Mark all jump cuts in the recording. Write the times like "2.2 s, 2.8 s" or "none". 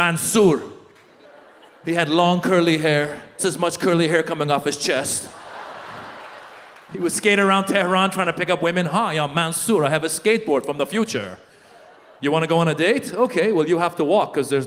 3.4 s